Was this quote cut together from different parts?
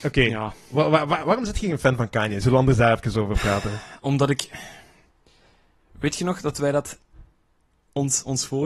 no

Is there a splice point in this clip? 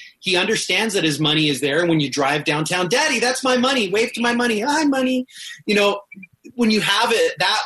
no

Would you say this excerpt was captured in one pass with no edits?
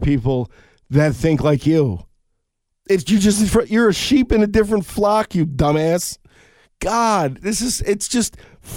yes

